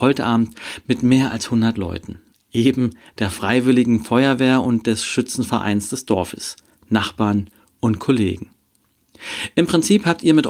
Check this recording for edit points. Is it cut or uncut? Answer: uncut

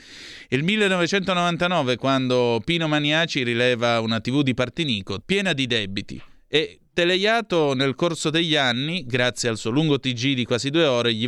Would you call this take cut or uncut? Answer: cut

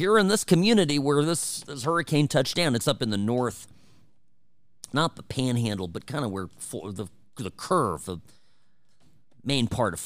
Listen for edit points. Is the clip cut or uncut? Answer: uncut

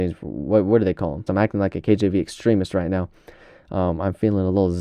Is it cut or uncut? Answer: cut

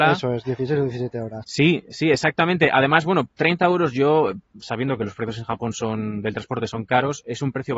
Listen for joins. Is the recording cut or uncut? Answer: cut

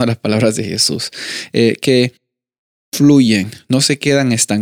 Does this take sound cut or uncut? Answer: uncut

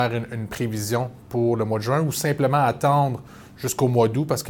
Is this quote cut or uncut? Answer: uncut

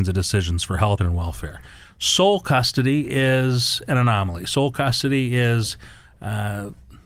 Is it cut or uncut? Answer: cut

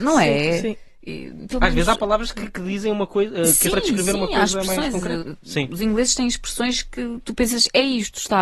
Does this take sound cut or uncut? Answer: cut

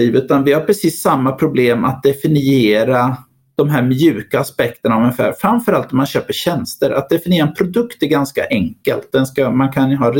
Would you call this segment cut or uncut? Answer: uncut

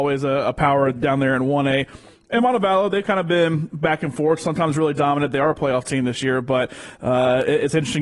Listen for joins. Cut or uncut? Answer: uncut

